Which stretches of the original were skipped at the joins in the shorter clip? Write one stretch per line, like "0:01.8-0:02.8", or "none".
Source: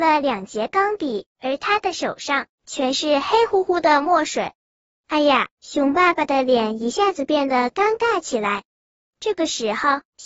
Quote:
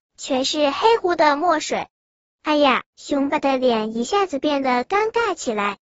0:03.5-0:03.6
0:05.9-0:06.2